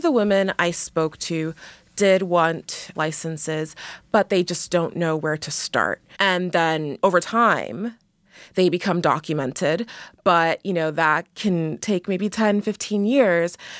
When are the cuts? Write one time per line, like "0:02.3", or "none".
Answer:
0:06.1